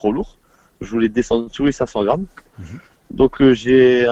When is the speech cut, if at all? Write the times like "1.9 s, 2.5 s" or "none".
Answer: none